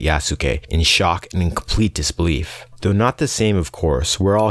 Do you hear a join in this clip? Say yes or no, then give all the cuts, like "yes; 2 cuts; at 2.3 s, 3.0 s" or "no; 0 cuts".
yes; 1 cut; at 2.8 s